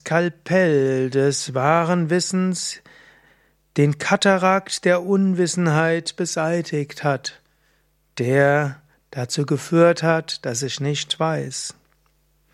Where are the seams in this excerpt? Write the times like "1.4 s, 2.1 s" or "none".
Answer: none